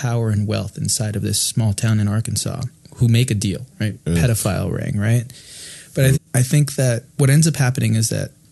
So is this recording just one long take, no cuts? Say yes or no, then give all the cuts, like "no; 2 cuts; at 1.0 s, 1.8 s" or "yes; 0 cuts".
no; 2 cuts; at 4.0 s, 6.1 s